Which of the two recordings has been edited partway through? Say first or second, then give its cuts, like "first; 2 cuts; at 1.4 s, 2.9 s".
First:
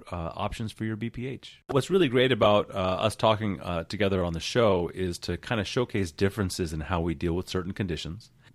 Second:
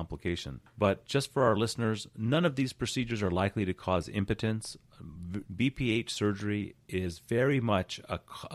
second; 1 cut; at 5.4 s